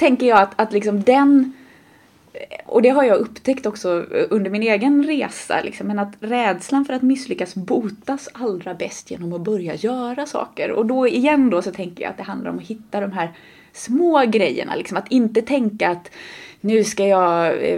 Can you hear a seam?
no; 0 cuts

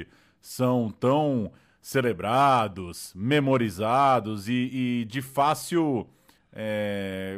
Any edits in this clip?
no; 0 cuts

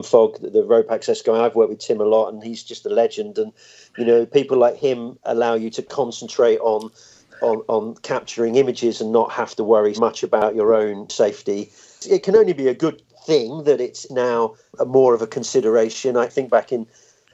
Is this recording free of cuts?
no; 1 cut; at 10.0 s

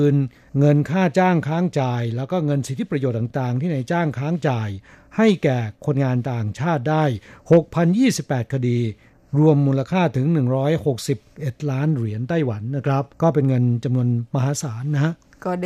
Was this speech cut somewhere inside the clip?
yes; 1 cut; at 13.1 s

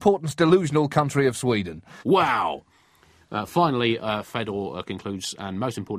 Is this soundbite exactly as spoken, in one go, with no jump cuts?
no; 1 cut; at 2.0 s

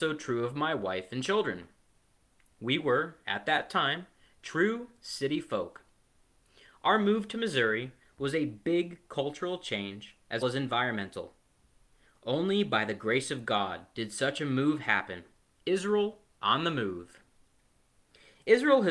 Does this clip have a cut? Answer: yes; 2 cuts; at 10.4 s, 15.6 s

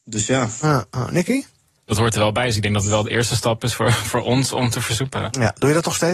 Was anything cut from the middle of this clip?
yes; 1 cut; at 1.8 s

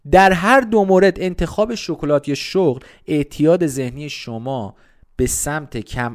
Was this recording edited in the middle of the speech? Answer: no; 0 cuts

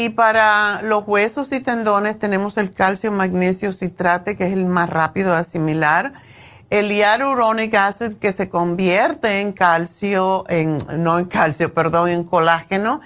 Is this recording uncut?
yes; 0 cuts

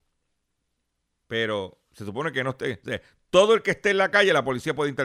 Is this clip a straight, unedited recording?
no; 1 cut; at 1.2 s

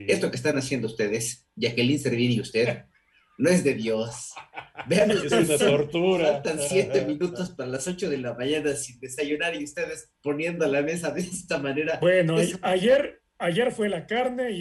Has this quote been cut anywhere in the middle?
no; 0 cuts

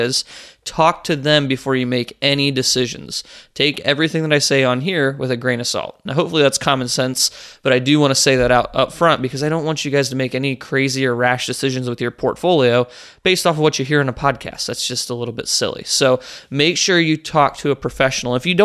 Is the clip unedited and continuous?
yes; 0 cuts

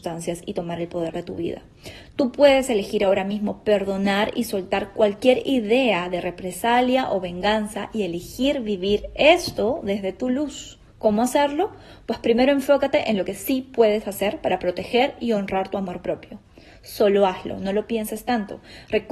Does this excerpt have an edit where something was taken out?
yes; 1 cut; at 10.9 s

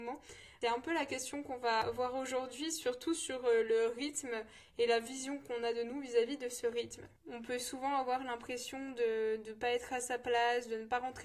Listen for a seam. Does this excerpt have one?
no; 0 cuts

